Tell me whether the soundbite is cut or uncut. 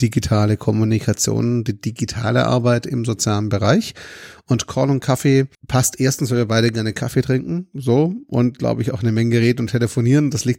cut